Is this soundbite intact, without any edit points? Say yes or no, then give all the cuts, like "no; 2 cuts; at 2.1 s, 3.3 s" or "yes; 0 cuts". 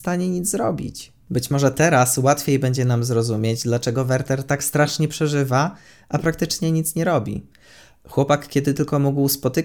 yes; 0 cuts